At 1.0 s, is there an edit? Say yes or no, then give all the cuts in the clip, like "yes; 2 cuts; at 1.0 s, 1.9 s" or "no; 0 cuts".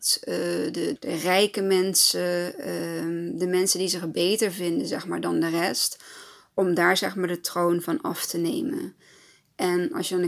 yes; 1 cut; at 1.0 s